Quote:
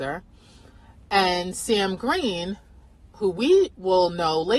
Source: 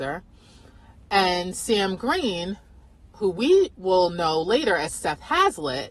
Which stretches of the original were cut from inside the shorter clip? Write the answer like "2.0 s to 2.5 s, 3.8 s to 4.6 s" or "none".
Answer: none